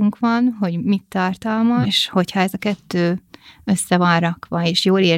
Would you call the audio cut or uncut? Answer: cut